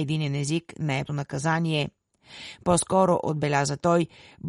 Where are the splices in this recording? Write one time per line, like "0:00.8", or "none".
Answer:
0:01.1